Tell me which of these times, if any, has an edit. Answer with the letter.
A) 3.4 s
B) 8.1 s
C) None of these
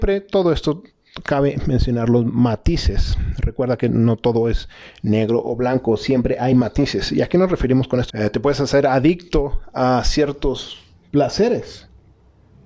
B